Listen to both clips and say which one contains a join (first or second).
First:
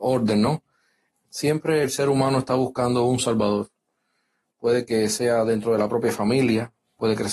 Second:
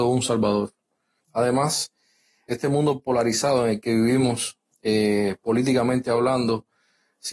second